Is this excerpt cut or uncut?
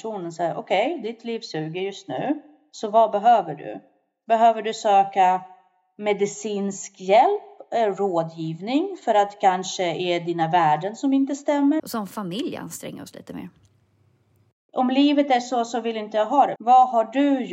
cut